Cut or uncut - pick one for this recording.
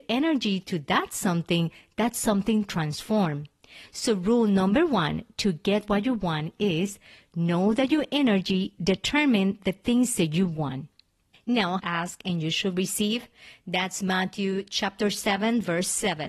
cut